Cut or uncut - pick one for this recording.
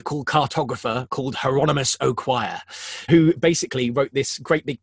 cut